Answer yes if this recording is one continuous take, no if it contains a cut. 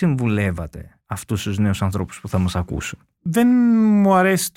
yes